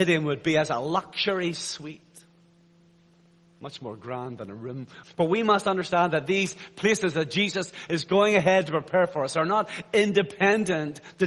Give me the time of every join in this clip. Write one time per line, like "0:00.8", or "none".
0:05.0